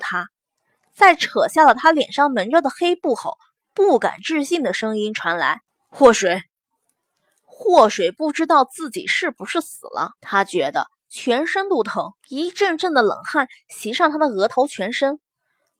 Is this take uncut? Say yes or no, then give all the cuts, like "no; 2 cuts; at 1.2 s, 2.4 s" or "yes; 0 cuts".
no; 2 cuts; at 10.2 s, 12.2 s